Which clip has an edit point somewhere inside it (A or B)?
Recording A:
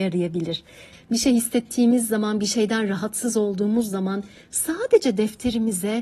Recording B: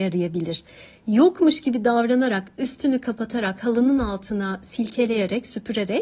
A